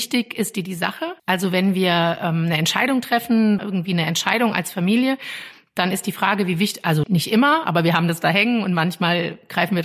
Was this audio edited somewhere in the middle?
yes; 3 cuts; at 1.2 s, 3.6 s, 7.0 s

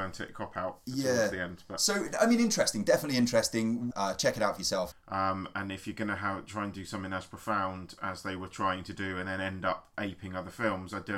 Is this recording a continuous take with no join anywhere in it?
no; 2 cuts; at 3.9 s, 4.9 s

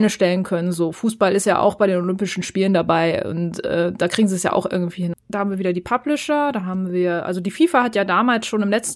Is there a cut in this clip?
yes; 1 cut; at 5.1 s

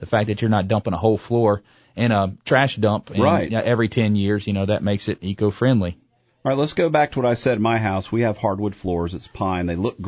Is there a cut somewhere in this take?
no; 0 cuts

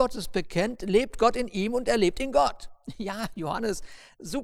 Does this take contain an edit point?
no; 0 cuts

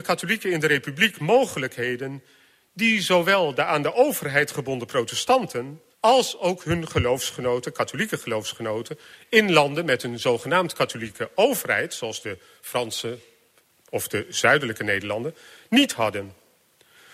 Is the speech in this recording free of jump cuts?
no; 1 cut; at 5.9 s

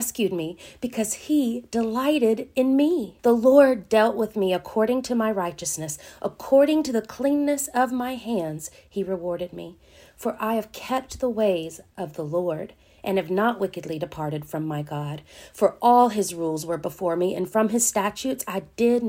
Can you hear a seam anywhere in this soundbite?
yes; 1 cut; at 3.2 s

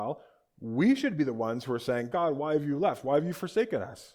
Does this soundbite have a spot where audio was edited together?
yes; 1 cut; at 2.1 s

